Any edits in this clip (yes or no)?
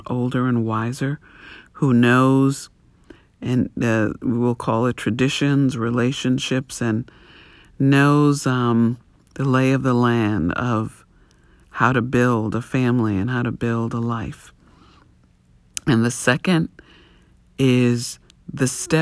no